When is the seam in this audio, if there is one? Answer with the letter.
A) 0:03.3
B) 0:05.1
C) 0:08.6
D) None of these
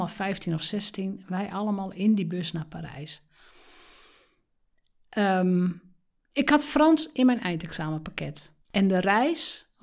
C